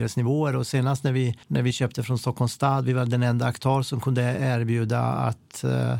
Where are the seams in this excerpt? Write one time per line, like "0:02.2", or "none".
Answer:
0:01.4